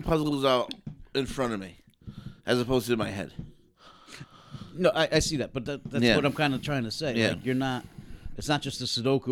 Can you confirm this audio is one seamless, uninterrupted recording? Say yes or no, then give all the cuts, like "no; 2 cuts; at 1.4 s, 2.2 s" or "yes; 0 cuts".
yes; 0 cuts